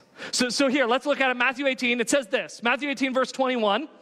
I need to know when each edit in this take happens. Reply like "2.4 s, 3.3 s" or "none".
none